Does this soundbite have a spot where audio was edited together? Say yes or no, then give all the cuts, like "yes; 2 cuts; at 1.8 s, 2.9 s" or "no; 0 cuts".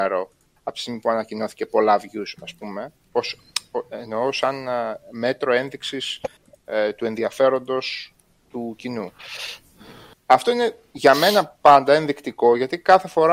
yes; 2 cuts; at 3.0 s, 10.1 s